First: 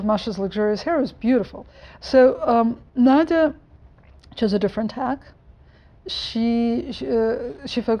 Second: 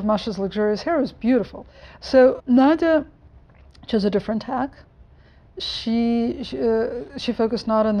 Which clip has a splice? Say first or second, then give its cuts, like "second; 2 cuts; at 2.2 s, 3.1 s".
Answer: second; 1 cut; at 2.4 s